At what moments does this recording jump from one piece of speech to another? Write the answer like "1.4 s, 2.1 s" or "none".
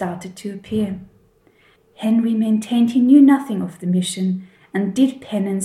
1.8 s